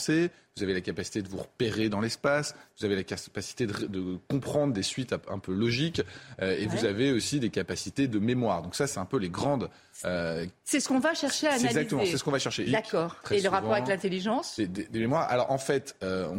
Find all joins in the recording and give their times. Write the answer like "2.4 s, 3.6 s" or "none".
12.7 s